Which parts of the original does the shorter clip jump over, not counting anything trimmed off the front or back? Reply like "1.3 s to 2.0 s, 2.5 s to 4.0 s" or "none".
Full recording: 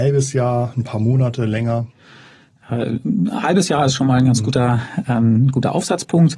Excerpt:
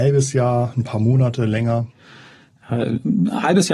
none

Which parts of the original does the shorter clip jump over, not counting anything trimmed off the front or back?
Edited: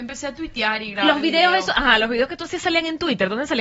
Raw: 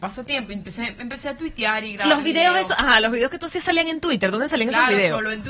none

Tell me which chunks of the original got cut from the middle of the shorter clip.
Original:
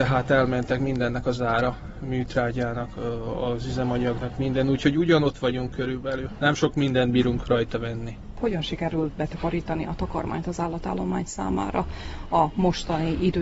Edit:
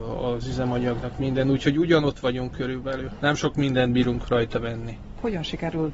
none

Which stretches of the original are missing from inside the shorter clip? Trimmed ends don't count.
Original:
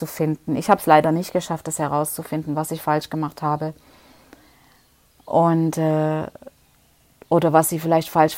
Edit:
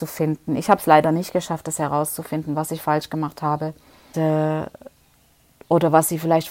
4.1 s to 5.7 s

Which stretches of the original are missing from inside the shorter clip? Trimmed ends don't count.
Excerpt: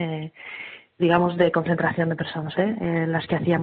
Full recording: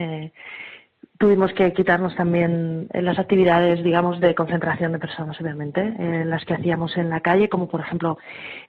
1.0 s to 3.8 s, 5.4 s to 5.7 s

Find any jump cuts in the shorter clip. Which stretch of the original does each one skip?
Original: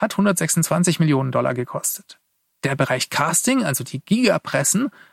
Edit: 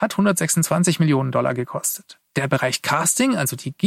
2.3 s to 2.6 s

